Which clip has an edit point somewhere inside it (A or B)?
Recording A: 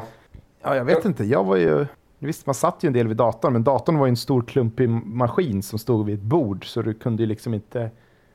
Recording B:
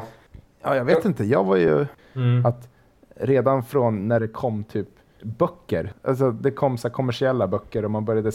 B